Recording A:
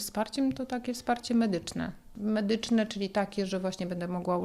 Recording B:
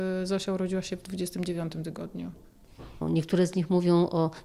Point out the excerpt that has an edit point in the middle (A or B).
B